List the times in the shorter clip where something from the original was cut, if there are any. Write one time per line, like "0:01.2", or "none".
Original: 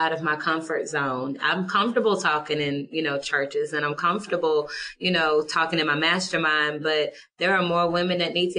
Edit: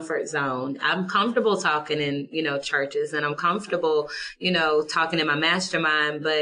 none

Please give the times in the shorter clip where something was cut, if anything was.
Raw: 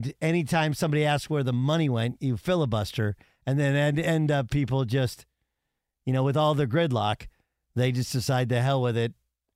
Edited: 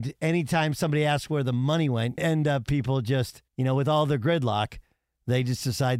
0:02.2
0:03.5

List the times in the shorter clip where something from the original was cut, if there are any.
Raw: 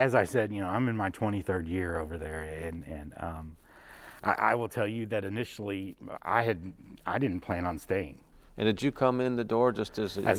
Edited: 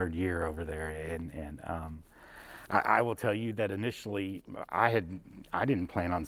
none

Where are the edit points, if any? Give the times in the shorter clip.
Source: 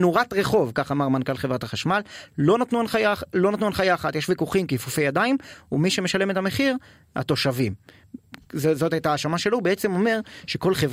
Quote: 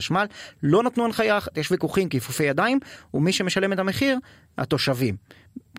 0:01.5

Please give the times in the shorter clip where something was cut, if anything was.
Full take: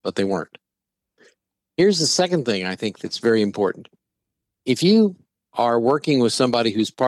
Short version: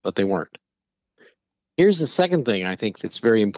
none

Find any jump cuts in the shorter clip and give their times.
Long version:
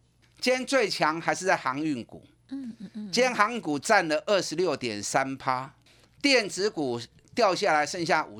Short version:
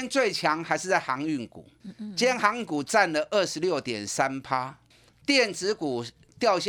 0:01.8

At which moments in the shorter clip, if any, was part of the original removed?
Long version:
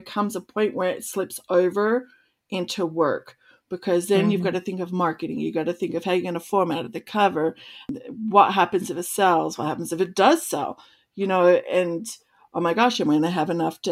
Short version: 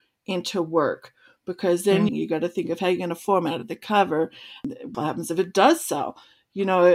0:02.1
0:04.9

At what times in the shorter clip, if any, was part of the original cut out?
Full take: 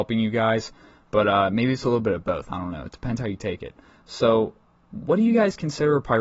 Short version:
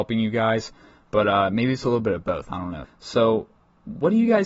0:02.8

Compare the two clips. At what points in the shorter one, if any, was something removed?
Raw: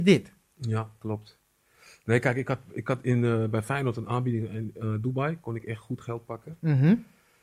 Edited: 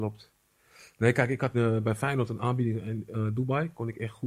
0:01.5

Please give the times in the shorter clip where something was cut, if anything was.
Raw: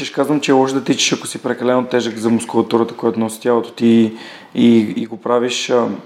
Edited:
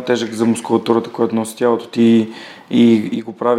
none

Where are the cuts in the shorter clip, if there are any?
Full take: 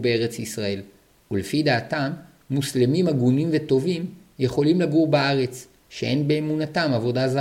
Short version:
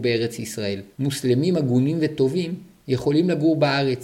0:00.9

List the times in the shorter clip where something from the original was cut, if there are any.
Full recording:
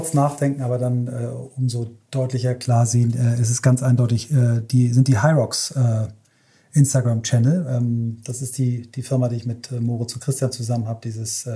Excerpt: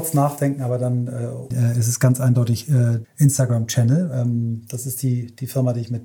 0:01.5
0:03.0

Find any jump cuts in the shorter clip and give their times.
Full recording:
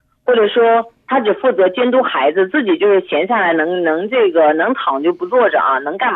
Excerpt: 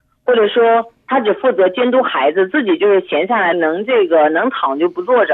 0:03.5

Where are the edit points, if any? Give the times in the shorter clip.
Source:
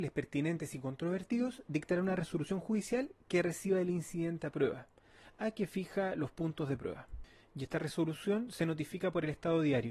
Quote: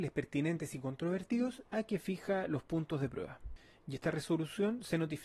0:01.6

